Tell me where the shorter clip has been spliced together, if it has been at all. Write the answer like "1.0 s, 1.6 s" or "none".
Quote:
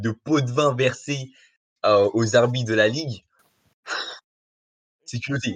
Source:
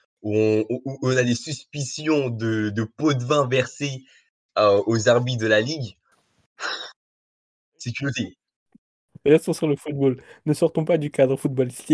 none